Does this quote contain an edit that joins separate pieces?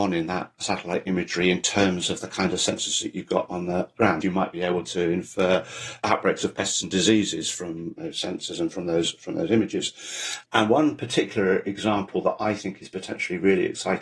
yes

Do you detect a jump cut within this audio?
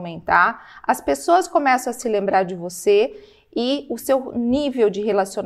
no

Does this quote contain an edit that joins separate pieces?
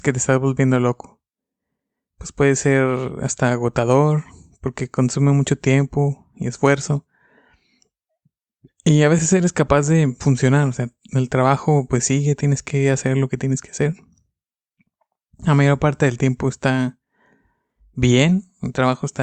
no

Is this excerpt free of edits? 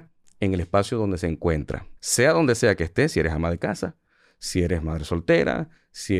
no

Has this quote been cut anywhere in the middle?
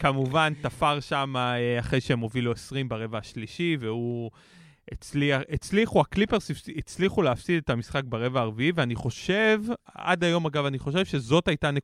no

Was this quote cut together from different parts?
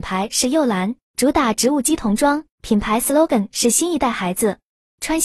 yes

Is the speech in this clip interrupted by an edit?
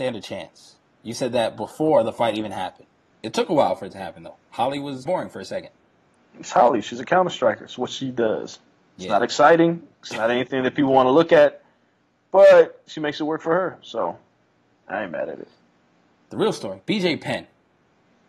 yes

